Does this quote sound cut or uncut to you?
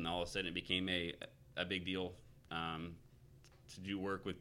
cut